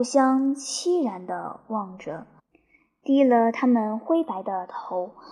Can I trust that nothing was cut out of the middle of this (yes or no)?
yes